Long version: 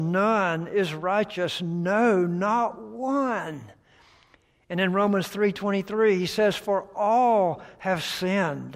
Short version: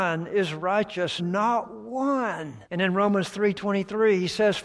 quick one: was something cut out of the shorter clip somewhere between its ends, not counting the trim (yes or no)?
yes